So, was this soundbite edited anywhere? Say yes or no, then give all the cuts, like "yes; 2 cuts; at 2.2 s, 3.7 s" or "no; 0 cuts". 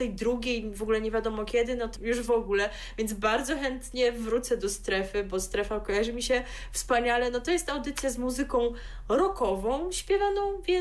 yes; 1 cut; at 2.0 s